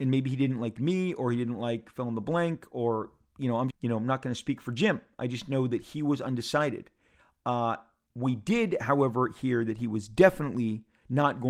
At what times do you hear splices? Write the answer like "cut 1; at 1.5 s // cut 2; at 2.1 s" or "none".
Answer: cut 1; at 3.7 s